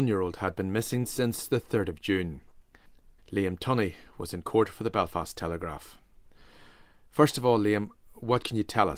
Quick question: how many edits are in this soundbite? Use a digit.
1